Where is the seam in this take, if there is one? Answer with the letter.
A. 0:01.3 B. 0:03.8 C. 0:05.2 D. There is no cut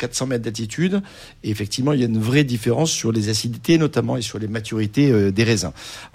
D